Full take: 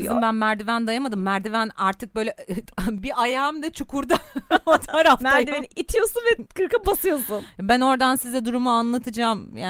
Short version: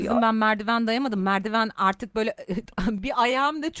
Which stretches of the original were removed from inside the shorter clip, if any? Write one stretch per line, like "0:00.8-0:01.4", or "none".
none